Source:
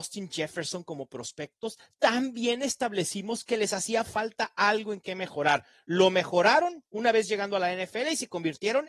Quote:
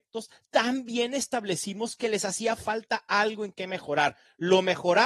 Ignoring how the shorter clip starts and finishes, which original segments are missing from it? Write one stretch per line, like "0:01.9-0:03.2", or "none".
none